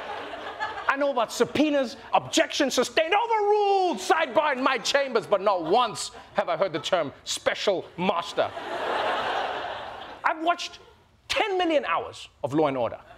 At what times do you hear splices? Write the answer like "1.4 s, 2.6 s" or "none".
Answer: 2.1 s, 10.2 s